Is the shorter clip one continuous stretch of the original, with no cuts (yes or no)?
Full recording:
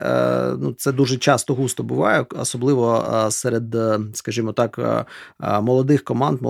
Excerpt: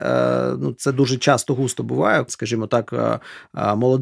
no